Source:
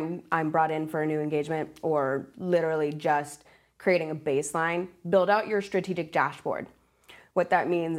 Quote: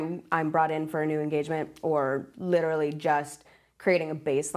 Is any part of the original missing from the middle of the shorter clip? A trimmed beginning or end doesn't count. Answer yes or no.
no